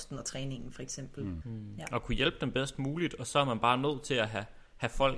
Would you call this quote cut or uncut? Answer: cut